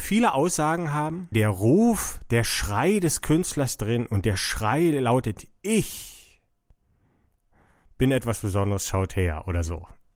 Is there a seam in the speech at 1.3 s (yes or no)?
yes